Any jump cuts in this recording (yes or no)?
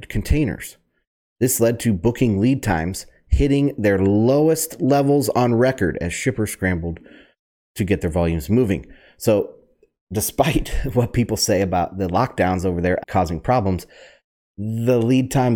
yes